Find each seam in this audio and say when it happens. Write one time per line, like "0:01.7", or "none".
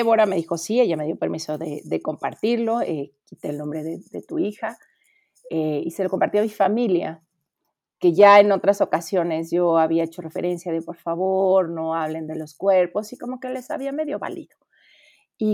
none